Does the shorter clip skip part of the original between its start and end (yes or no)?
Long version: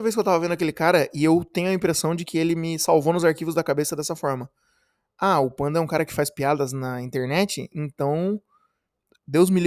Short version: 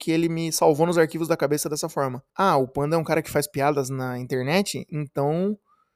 yes